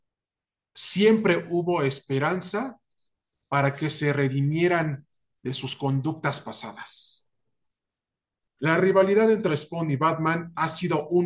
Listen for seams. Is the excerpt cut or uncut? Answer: cut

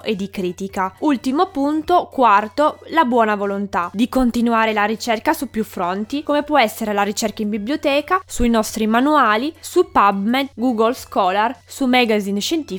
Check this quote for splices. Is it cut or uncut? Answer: uncut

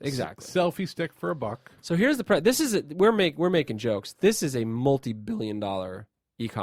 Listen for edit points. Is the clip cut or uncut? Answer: uncut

